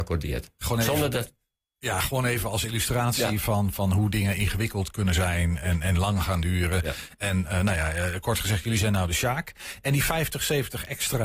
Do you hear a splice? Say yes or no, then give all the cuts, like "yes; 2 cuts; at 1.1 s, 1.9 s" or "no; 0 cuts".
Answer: no; 0 cuts